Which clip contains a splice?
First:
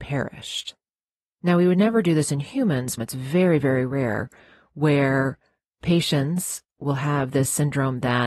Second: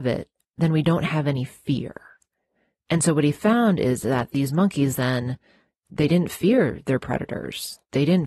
first; 1 cut; at 3.0 s

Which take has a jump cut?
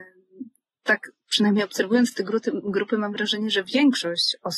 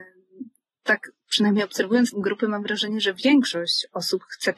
second; 1 cut; at 2.1 s

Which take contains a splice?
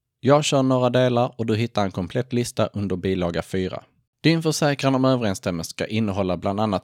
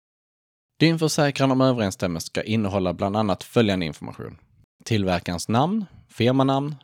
first; 1 cut; at 4.1 s

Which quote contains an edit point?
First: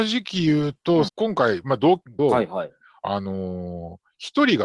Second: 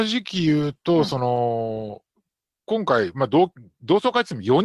first; 2 cuts; at 1.1 s, 2.2 s

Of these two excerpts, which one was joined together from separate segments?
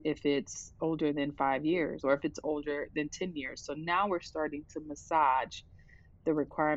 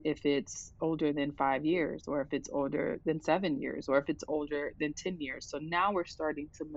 first; 1 cut; at 2.0 s

